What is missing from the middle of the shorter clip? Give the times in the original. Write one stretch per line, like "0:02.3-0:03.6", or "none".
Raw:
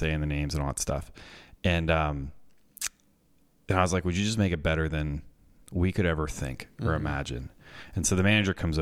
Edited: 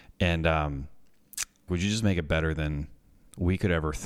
0:03.1-0:04.0